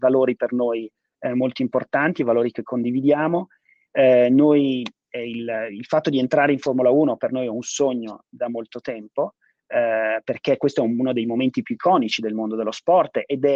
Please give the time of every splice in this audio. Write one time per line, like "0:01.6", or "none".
0:03.9